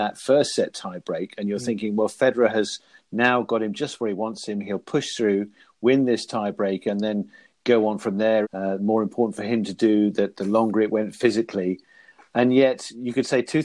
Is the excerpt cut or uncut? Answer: cut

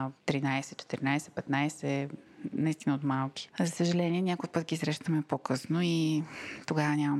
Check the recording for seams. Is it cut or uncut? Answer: cut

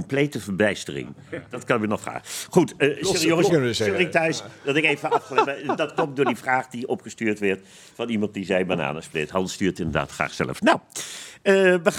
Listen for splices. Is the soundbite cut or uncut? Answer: cut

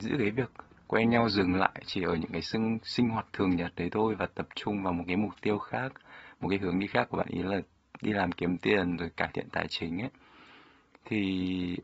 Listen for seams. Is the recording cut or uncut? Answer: uncut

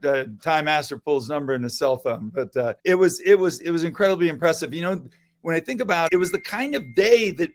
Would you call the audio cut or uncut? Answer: cut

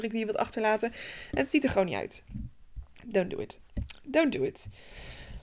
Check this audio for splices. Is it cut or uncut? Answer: uncut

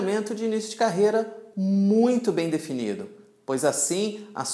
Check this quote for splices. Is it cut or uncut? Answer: uncut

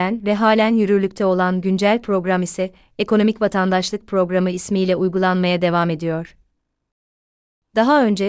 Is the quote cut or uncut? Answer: uncut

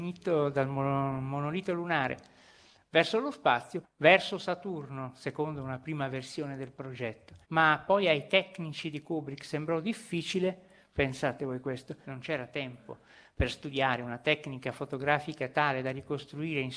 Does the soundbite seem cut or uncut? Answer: cut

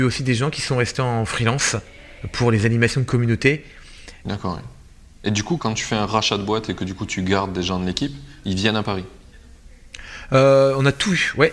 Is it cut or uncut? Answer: cut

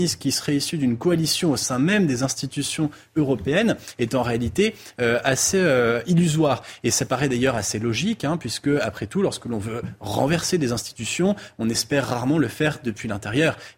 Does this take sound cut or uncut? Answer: uncut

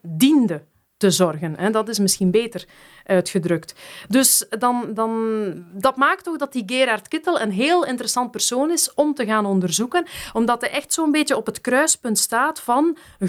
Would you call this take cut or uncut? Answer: uncut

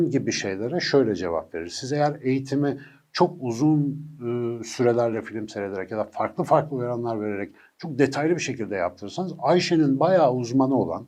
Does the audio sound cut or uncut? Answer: uncut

